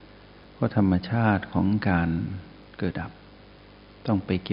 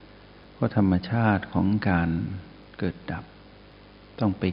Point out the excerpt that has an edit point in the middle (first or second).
first